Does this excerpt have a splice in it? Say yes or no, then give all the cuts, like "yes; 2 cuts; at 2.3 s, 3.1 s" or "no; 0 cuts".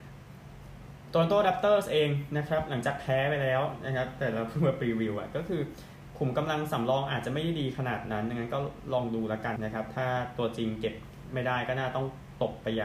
yes; 1 cut; at 9.6 s